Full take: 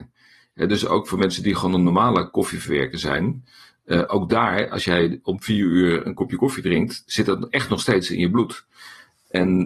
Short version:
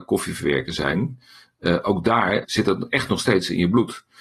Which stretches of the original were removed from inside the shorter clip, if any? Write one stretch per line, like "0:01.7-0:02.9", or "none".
0:04.7-0:07.0